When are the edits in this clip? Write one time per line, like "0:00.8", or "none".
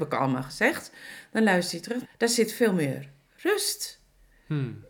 0:02.0